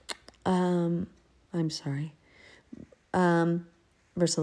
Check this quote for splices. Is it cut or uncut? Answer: cut